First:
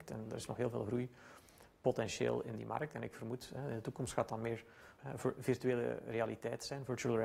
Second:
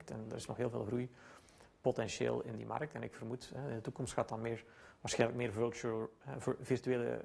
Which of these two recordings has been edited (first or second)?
first